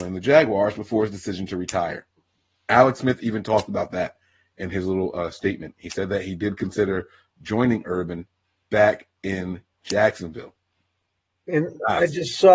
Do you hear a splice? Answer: no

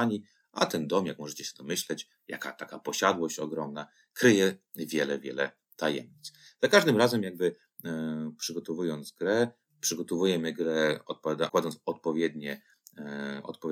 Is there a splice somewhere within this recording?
yes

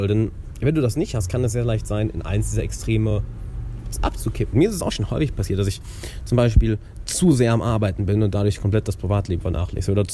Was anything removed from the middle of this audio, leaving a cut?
yes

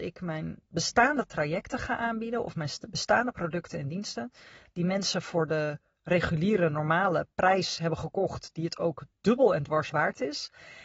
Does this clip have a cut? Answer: no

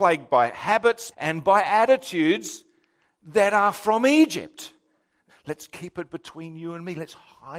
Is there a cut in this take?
yes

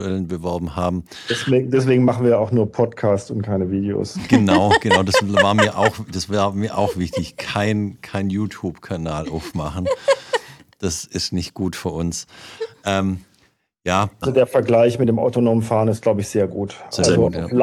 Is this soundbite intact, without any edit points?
no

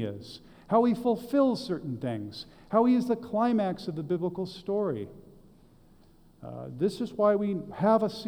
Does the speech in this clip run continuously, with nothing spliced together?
yes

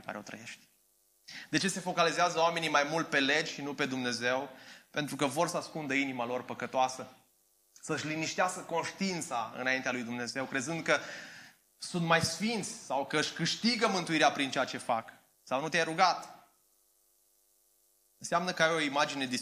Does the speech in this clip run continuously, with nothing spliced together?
no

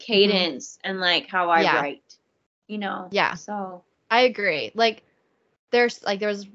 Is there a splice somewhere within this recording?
no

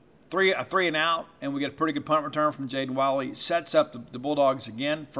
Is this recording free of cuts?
yes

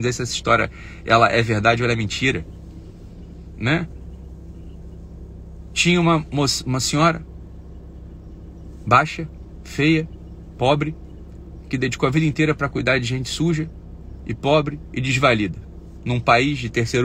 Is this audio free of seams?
yes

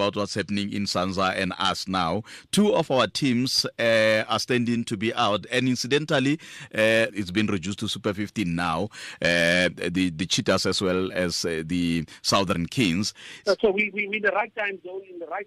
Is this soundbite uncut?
no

